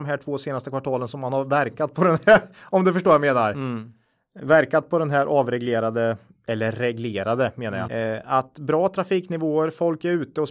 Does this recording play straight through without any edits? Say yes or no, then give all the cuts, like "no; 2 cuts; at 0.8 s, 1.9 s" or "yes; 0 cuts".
no; 1 cut; at 7.9 s